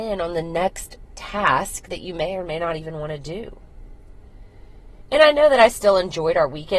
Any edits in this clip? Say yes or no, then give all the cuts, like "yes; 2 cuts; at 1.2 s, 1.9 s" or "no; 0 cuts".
no; 0 cuts